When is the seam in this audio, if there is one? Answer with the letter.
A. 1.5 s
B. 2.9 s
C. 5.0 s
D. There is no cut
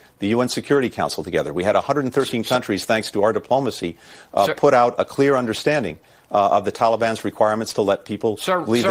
C